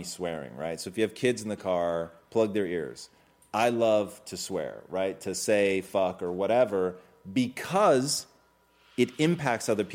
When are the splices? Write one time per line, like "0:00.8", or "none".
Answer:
none